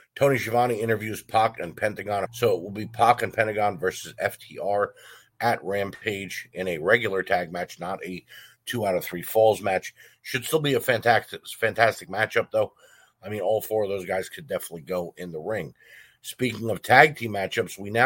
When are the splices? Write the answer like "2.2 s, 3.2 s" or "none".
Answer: 2.3 s

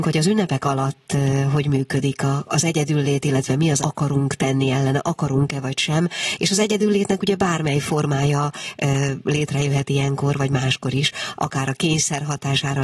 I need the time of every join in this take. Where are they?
3.8 s

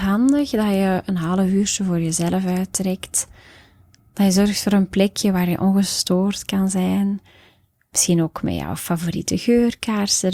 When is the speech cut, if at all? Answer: none

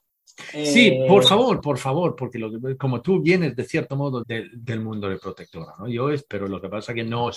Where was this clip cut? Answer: 1.6 s, 4.2 s, 6.3 s

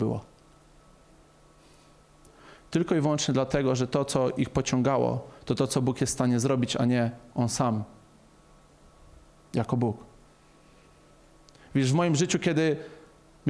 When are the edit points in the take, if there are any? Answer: none

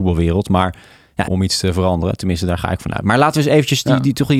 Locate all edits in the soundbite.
1.3 s

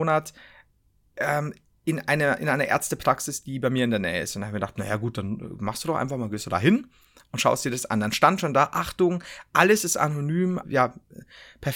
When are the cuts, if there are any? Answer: 10.6 s

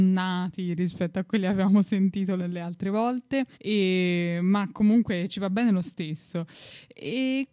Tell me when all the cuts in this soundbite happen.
2.4 s, 3.5 s

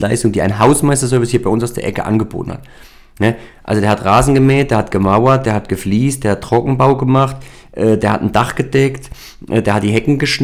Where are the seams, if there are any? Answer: none

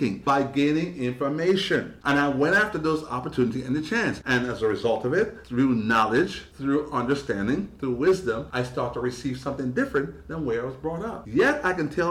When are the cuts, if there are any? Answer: 2.0 s

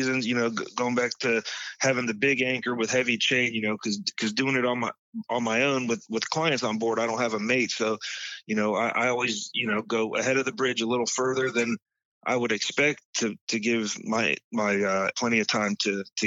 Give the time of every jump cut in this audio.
15.1 s

